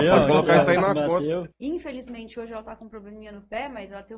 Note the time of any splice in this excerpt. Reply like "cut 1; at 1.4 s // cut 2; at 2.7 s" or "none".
cut 1; at 1.5 s